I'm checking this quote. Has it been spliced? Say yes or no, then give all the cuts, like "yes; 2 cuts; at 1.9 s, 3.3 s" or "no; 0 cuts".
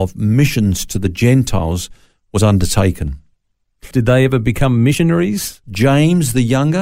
yes; 2 cuts; at 3.9 s, 5.6 s